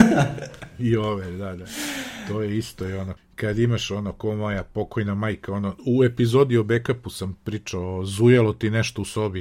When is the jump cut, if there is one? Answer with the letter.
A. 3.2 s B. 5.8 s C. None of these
A